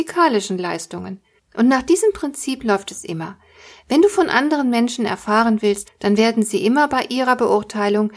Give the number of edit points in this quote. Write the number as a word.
two